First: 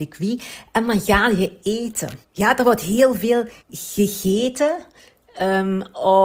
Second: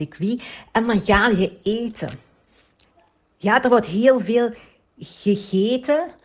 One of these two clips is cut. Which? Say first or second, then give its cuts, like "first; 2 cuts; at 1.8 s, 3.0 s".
first; 2 cuts; at 2.2 s, 3.6 s